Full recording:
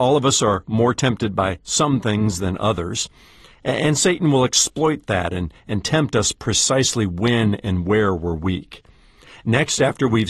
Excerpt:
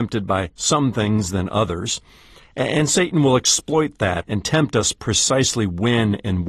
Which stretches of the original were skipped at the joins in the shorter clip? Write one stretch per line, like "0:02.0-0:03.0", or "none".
0:05.3-0:05.6